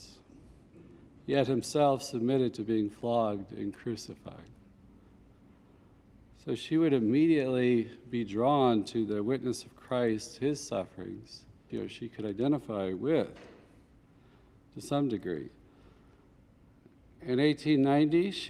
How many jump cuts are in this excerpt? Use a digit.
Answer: 1